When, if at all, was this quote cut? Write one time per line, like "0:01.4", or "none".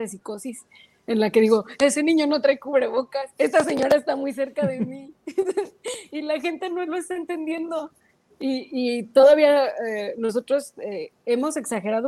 none